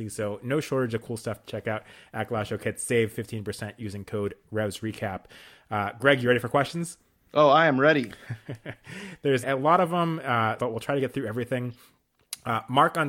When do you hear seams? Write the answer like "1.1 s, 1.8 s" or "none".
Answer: 9.4 s, 10.6 s